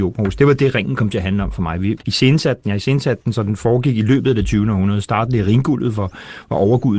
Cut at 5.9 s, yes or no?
no